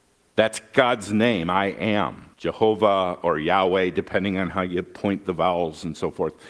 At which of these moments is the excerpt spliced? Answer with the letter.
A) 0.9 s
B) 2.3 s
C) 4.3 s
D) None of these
B